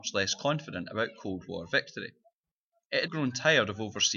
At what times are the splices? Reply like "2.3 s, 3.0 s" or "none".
3.1 s